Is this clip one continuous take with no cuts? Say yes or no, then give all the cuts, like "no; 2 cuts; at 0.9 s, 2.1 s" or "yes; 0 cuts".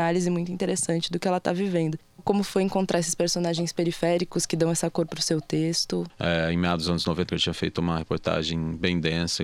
no; 2 cuts; at 6.1 s, 7.3 s